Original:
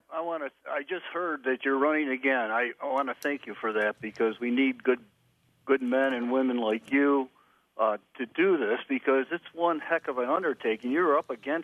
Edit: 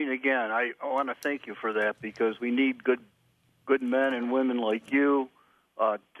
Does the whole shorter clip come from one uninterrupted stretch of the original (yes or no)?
yes